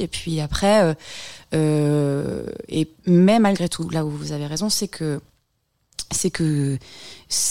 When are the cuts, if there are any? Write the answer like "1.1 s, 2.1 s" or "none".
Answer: none